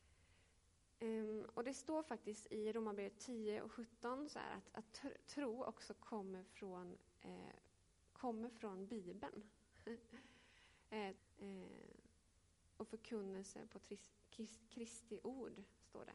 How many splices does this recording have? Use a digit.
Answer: 1